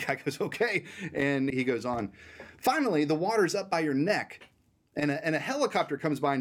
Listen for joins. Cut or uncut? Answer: cut